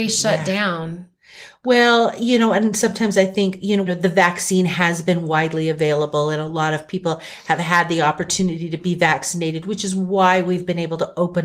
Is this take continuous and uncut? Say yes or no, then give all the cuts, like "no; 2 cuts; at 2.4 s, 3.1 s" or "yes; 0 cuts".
no; 1 cut; at 3.9 s